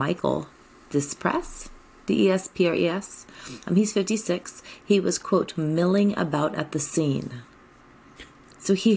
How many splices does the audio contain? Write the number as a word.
one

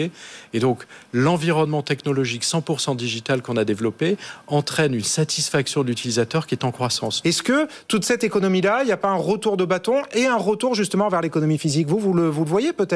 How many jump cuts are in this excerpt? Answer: one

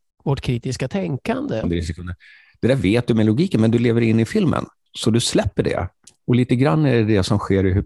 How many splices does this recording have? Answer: one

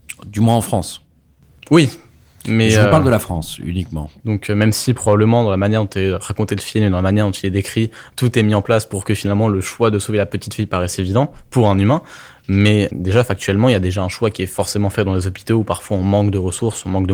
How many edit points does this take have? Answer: two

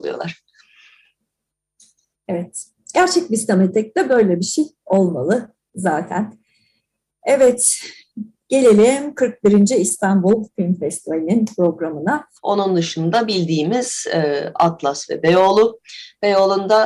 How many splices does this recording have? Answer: one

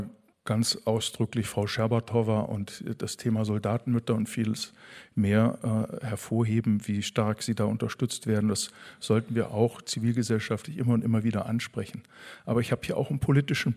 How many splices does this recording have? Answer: zero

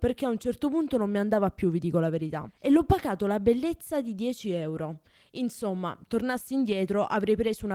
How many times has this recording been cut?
zero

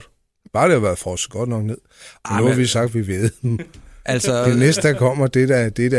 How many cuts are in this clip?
one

